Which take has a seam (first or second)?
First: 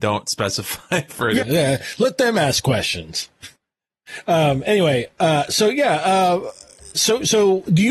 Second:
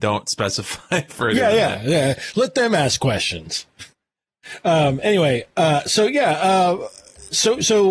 first